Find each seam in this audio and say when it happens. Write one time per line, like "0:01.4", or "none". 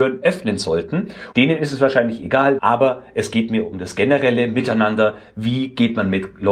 0:01.3
0:02.6